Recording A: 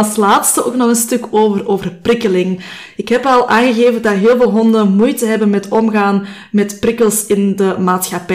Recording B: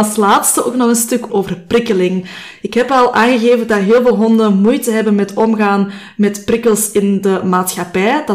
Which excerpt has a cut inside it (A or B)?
B